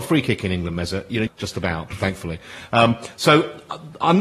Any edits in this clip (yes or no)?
yes